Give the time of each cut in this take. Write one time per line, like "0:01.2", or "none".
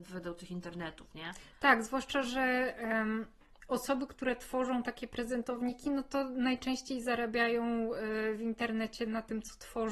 none